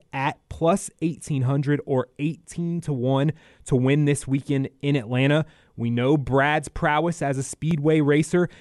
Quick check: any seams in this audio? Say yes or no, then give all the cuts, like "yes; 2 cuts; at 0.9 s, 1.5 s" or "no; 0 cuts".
no; 0 cuts